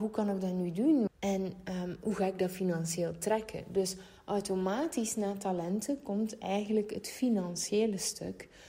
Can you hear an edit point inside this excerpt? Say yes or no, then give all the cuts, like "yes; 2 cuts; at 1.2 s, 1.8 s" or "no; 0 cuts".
yes; 1 cut; at 1.1 s